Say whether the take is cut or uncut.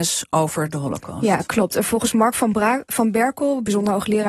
uncut